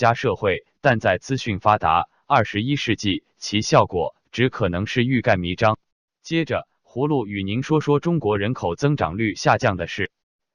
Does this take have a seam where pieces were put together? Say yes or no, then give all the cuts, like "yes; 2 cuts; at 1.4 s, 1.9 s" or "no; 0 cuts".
yes; 1 cut; at 6.1 s